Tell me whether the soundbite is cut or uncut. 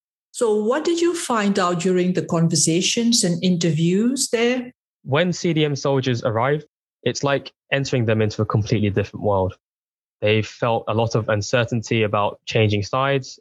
uncut